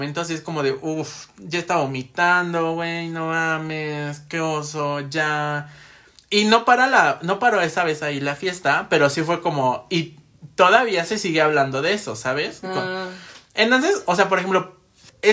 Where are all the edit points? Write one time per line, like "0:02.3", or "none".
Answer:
0:12.6

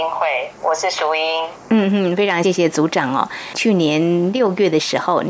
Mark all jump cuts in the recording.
0:02.4

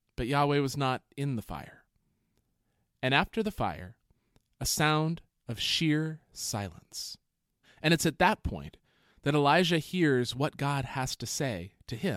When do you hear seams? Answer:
0:07.6

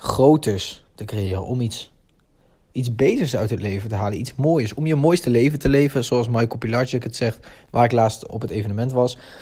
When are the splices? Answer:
0:08.3

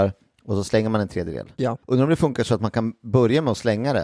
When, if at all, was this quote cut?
0:01.8

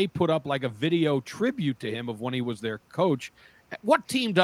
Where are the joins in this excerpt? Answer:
none

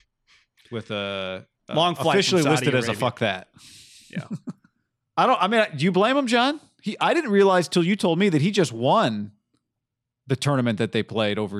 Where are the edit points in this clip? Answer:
none

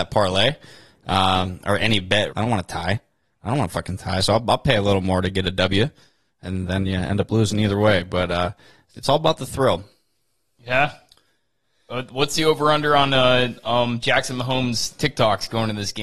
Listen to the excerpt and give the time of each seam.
0:02.3

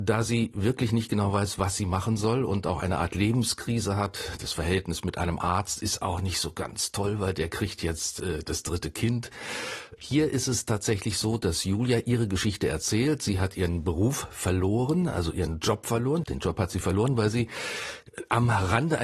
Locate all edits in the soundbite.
0:10.0
0:16.2

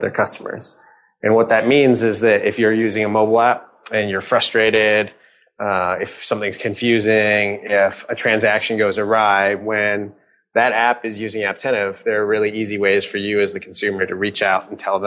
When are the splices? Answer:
none

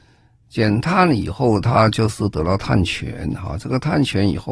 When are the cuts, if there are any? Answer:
none

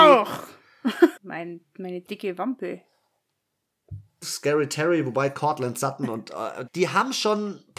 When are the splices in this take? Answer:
0:01.2
0:04.2
0:06.7

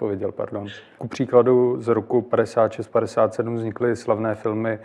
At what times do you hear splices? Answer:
0:01.0

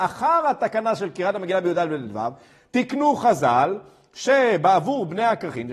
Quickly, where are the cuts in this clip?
none

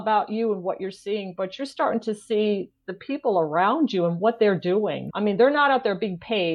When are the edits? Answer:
0:05.1

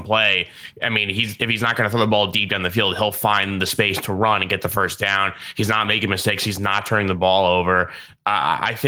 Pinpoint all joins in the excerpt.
none

